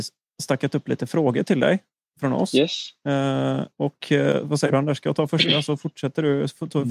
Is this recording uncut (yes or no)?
yes